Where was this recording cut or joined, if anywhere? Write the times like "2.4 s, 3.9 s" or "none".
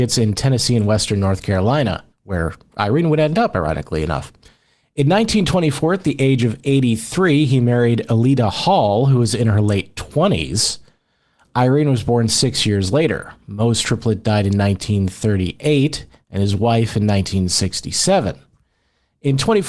2.1 s